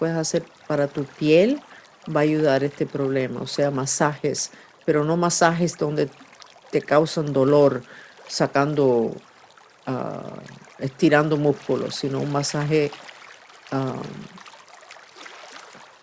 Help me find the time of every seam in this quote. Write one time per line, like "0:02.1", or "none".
none